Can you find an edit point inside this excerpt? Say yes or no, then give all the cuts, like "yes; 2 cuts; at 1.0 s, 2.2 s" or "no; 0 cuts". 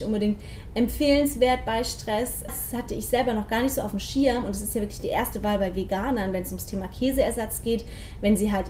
yes; 1 cut; at 2.5 s